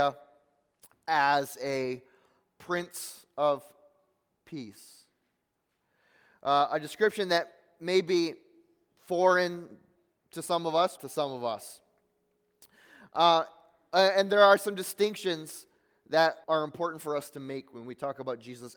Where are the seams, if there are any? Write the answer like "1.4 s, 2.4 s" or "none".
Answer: 11.0 s, 16.4 s